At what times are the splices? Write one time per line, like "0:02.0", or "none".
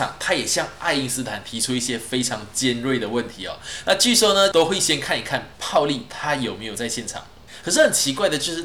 0:04.5
0:07.6